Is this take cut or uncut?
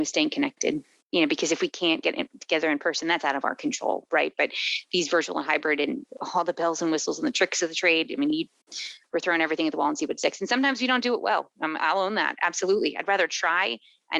uncut